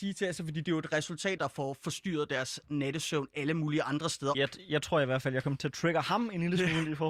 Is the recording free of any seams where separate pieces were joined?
no; 2 cuts; at 1.4 s, 4.3 s

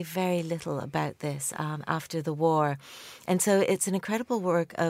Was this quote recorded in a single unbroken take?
yes; 0 cuts

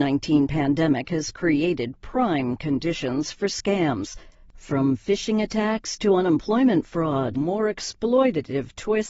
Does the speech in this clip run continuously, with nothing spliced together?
no; 1 cut; at 7.3 s

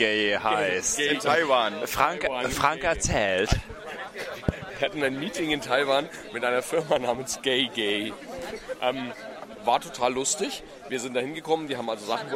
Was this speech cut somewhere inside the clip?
no; 0 cuts

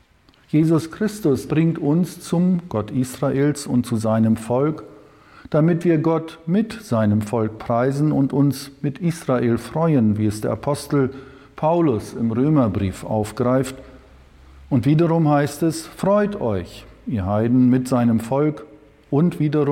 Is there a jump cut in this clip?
yes; 1 cut; at 1.5 s

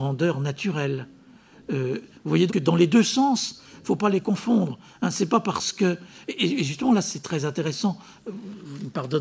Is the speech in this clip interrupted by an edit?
yes; 1 cut; at 2.5 s

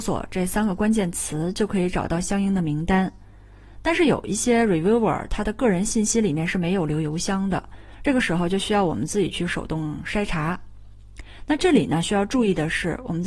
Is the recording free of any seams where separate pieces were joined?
yes; 0 cuts

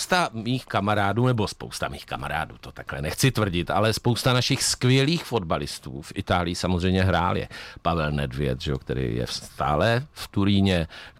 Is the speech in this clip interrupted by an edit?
no; 0 cuts

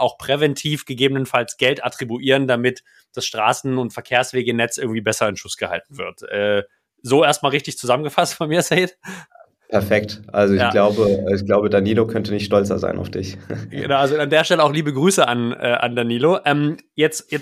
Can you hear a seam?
no; 0 cuts

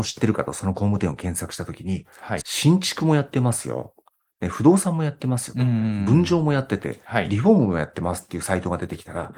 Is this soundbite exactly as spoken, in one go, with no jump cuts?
no; 1 cut; at 2.4 s

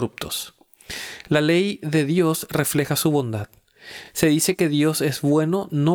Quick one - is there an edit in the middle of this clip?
no; 0 cuts

